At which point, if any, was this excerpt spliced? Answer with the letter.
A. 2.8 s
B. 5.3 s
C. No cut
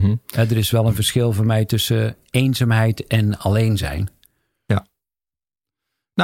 C